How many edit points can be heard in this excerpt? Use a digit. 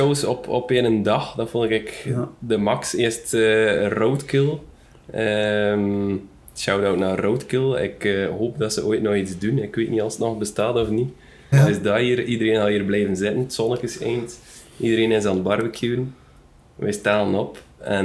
1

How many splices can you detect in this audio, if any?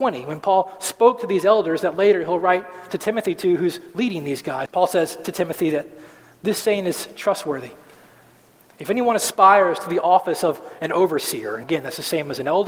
2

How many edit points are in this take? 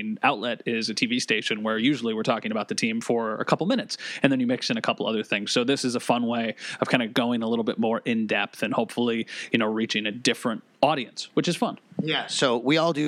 1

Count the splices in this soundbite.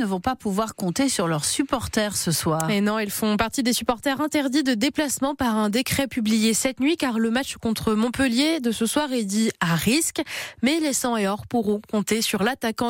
0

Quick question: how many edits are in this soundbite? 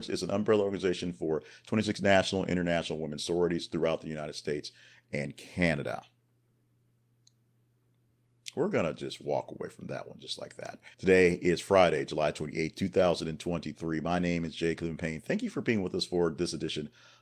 1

